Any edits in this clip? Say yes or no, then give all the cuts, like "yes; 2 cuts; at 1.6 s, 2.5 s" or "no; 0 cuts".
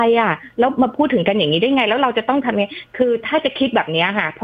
no; 0 cuts